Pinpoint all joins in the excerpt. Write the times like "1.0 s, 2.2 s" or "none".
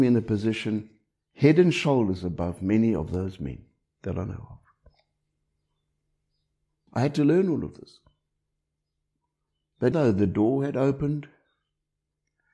6.9 s, 9.9 s